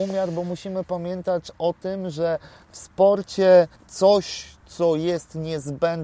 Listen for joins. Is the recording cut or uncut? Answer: uncut